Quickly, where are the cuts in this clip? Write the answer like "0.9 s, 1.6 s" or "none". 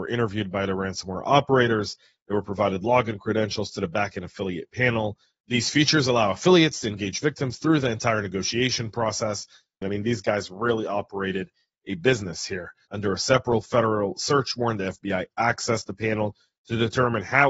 5.4 s, 9.8 s, 12.9 s